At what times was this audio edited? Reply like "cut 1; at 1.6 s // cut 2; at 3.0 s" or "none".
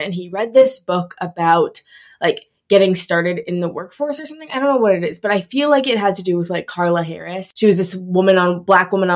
none